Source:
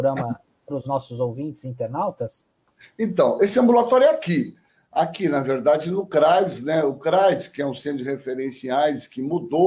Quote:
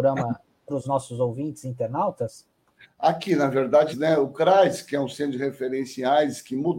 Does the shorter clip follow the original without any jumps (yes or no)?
no